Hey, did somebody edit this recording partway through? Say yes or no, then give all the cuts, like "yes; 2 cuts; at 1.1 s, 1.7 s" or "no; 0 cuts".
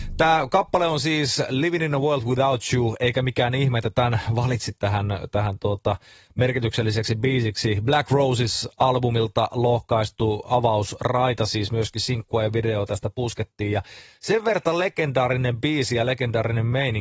no; 0 cuts